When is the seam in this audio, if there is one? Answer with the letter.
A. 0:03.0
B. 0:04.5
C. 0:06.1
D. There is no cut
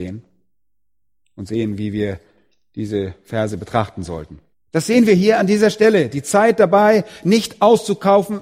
B